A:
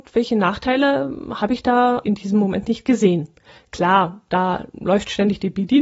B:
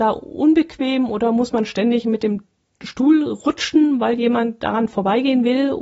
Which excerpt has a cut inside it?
A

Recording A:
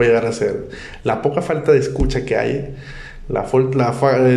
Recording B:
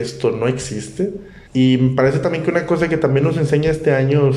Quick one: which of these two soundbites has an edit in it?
B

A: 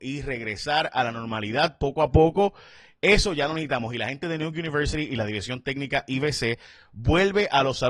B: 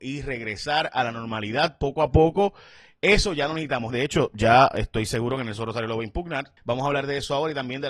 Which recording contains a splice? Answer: B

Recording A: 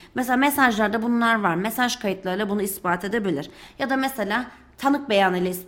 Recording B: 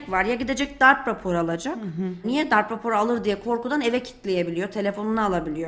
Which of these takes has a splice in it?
B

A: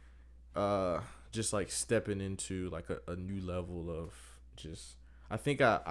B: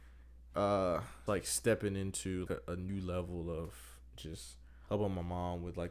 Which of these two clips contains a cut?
B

